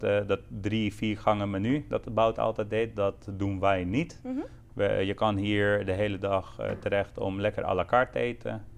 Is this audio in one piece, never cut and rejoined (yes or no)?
yes